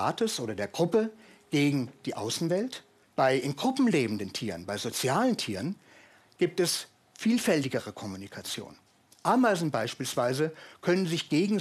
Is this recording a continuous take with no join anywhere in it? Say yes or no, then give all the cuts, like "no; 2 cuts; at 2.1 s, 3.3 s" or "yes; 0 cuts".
no; 1 cut; at 3.0 s